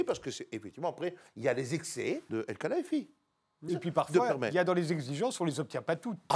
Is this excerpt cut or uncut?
cut